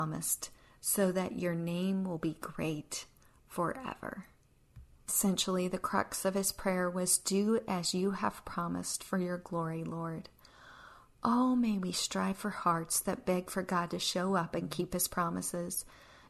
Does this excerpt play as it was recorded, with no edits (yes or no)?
yes